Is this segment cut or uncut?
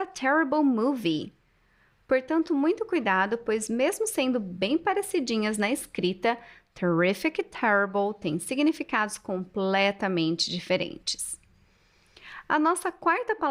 uncut